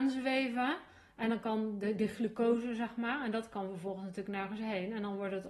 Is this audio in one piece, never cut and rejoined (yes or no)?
yes